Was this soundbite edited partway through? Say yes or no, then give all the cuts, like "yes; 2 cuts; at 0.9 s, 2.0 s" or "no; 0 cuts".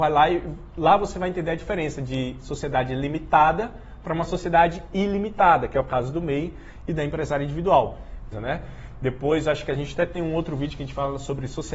yes; 1 cut; at 8.3 s